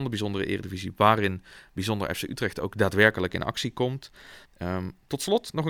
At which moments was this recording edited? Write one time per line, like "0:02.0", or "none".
0:04.4